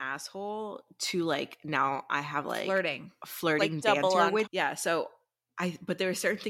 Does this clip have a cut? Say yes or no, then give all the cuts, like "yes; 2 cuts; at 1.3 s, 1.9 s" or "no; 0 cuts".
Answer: yes; 1 cut; at 4.5 s